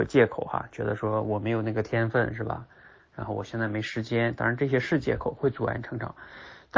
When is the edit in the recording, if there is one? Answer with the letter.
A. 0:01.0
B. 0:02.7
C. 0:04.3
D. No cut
D